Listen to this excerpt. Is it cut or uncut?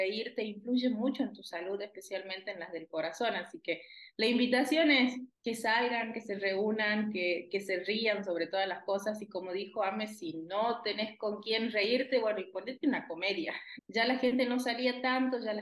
cut